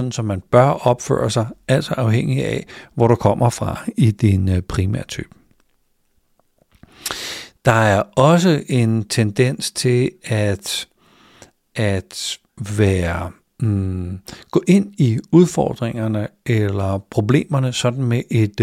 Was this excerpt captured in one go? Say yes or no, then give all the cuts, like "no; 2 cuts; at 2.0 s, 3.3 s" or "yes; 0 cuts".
yes; 0 cuts